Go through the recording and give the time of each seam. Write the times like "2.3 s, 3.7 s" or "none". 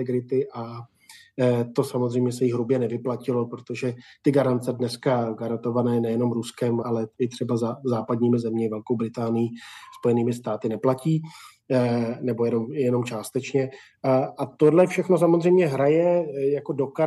6.8 s